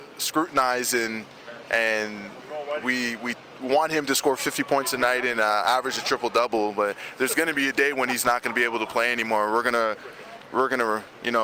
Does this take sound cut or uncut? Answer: uncut